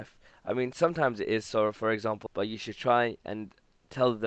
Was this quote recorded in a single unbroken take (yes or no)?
no